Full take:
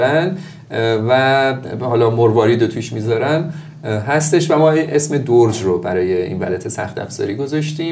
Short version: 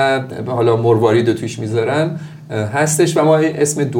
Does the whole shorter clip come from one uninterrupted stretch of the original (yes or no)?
yes